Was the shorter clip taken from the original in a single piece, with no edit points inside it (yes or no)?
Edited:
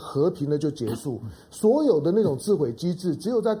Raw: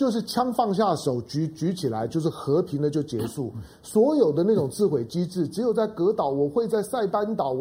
yes